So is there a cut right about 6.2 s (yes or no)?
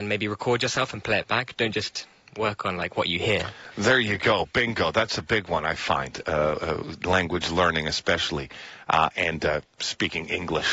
no